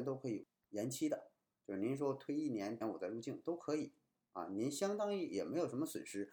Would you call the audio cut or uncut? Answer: cut